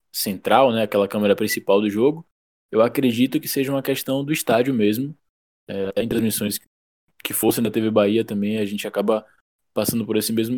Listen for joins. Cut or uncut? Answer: uncut